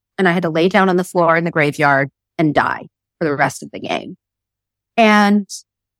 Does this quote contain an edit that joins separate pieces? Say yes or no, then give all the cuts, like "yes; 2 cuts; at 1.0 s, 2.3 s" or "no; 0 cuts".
no; 0 cuts